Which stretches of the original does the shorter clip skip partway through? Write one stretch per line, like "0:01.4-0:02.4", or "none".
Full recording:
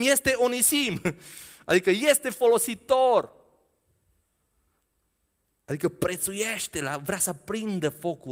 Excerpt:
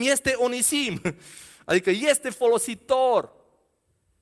none